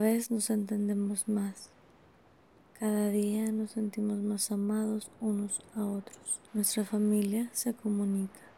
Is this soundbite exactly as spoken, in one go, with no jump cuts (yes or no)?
no